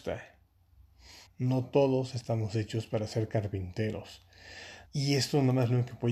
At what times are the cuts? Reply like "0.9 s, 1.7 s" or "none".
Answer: 1.3 s, 4.9 s